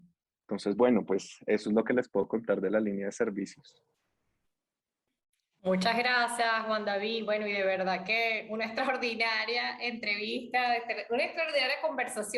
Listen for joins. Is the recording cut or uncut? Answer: uncut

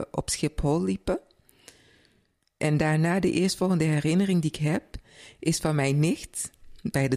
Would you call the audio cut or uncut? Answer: uncut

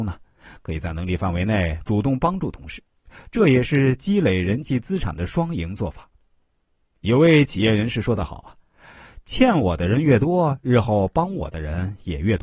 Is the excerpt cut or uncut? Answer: uncut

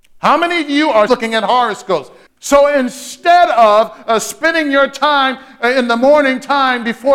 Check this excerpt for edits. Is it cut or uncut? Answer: cut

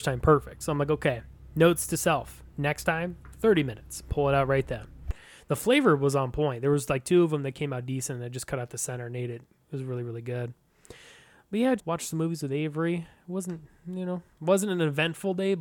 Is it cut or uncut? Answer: cut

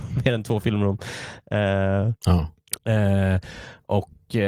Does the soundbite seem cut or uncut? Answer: cut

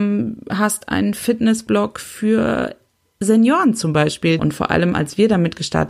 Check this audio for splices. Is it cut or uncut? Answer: cut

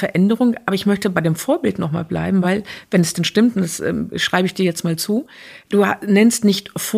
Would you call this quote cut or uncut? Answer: uncut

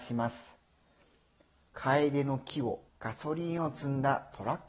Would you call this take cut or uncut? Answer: cut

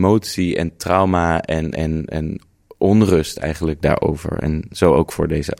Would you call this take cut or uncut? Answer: uncut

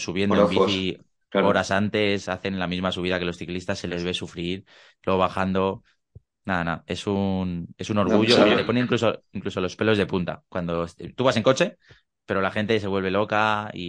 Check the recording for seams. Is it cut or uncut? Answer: uncut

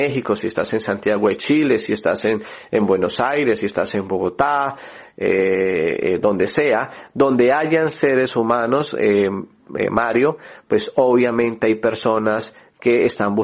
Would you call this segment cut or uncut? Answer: uncut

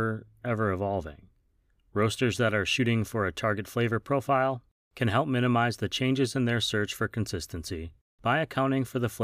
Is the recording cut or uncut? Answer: cut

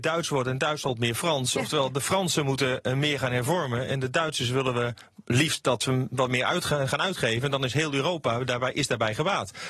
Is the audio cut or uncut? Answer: uncut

